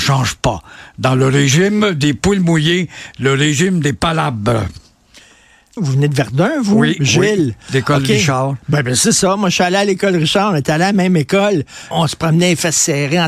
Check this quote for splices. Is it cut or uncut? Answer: cut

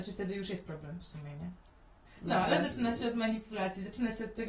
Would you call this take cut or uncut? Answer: uncut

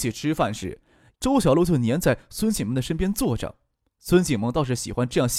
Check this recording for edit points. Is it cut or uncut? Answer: cut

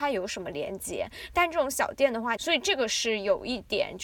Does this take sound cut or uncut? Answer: cut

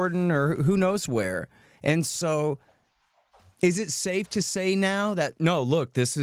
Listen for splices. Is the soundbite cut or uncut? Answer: uncut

